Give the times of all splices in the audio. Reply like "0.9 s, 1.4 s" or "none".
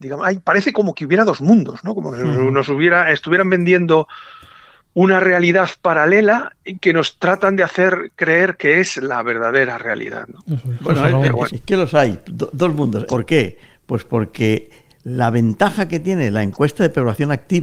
11.5 s, 13.1 s